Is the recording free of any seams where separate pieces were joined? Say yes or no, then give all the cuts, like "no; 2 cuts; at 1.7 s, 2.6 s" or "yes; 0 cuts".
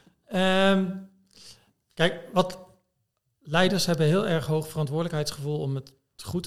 yes; 0 cuts